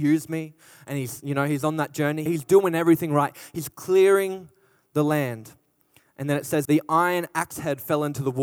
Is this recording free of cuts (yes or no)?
no